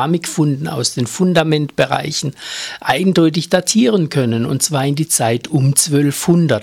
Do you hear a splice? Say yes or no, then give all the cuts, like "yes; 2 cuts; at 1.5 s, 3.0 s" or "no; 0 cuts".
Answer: no; 0 cuts